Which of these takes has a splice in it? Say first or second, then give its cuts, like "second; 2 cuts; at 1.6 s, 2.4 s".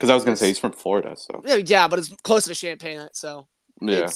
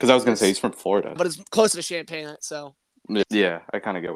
second; 2 cuts; at 1.2 s, 3.2 s